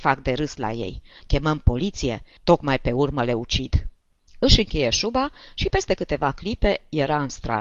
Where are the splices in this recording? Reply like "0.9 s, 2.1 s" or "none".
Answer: 2.4 s